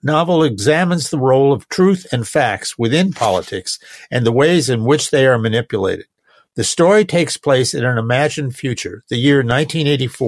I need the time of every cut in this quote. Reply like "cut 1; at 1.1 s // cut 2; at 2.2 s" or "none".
none

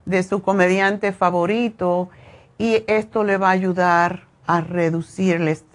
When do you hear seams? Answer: none

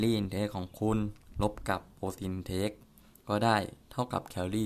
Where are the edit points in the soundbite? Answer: none

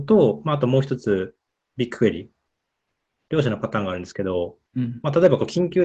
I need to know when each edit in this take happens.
cut 1; at 4.7 s

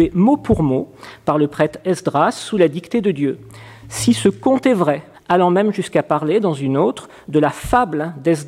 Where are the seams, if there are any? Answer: cut 1; at 5.1 s

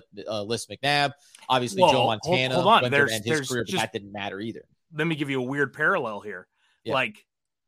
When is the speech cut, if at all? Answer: none

